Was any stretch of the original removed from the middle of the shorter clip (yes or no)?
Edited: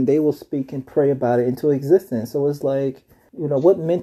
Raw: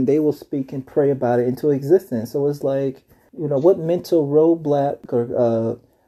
no